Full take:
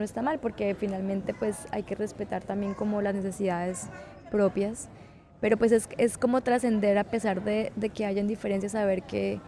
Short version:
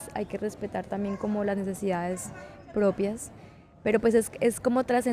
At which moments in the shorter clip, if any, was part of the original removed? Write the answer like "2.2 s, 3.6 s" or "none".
none